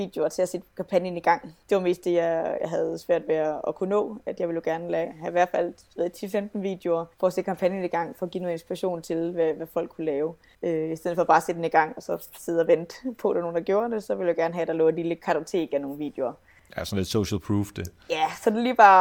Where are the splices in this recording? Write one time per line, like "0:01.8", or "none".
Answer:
0:07.1